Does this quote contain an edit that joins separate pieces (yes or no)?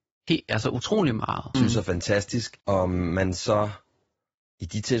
yes